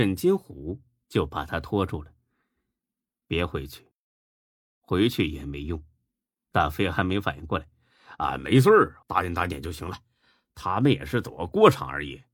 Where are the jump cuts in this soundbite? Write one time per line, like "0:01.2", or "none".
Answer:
0:09.0